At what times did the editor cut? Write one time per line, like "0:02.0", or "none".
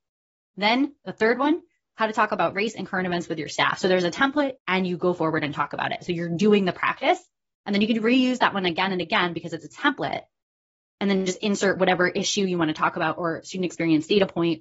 0:04.6